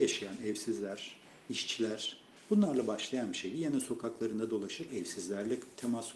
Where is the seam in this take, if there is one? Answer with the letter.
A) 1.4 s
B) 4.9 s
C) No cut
B